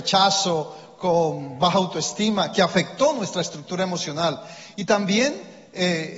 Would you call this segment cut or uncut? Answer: uncut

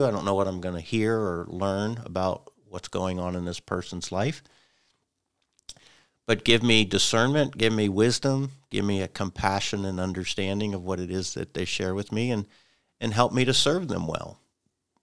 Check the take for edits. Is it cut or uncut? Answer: uncut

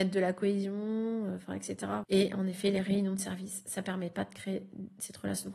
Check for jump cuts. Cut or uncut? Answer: cut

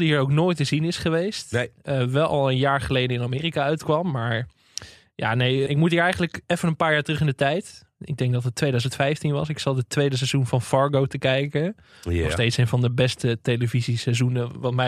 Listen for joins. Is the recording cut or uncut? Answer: cut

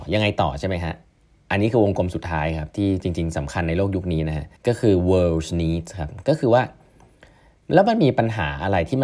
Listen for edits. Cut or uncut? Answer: cut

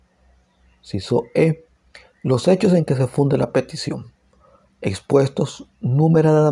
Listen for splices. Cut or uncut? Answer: uncut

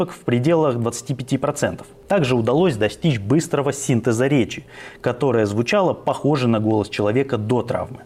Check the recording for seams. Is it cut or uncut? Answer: uncut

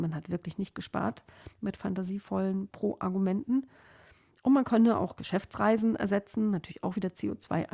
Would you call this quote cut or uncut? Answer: uncut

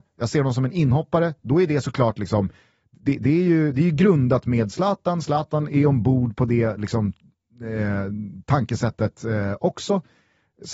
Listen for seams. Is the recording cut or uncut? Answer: uncut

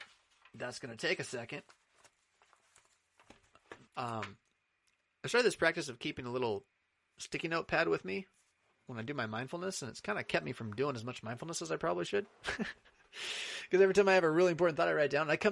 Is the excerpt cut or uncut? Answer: cut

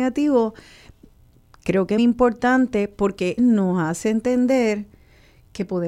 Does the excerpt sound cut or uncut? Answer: cut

